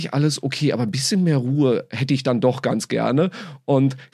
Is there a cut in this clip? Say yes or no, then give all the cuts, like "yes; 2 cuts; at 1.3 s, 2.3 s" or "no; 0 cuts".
no; 0 cuts